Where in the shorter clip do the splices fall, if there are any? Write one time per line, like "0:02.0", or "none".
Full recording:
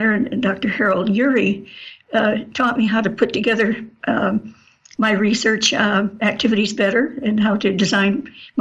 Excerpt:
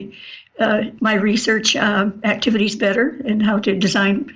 0:01.0